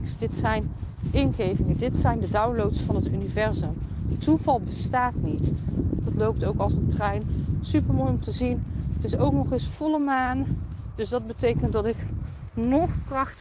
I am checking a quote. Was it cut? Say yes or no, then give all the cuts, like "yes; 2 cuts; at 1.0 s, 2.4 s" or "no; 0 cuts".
yes; 1 cut; at 6.0 s